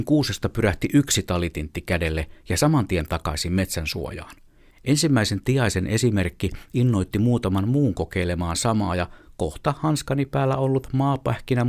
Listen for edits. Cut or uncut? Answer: cut